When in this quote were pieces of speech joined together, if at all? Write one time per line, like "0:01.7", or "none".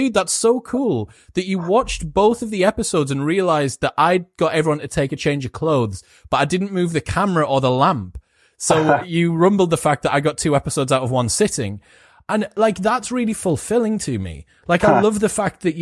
none